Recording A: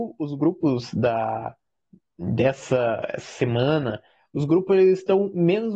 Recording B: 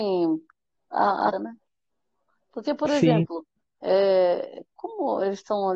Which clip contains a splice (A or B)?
B